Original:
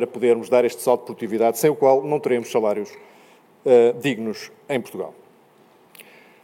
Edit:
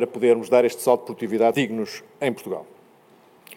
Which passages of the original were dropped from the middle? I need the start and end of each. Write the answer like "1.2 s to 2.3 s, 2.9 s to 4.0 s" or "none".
1.5 s to 4.0 s